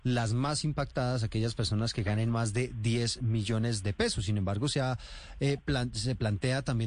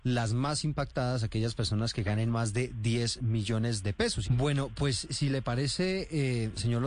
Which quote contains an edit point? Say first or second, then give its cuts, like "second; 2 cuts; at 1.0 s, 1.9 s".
second; 1 cut; at 4.2 s